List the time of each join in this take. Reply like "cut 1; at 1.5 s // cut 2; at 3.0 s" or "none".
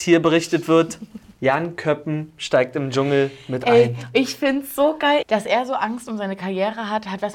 cut 1; at 5.2 s